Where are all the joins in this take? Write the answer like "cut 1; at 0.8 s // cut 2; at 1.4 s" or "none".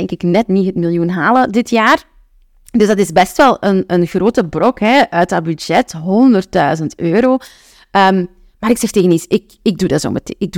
none